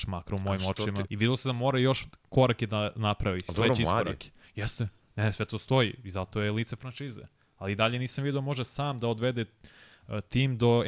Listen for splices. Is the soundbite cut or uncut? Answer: cut